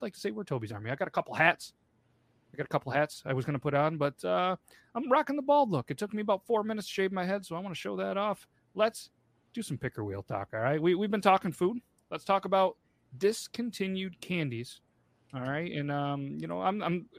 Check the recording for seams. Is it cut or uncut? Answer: uncut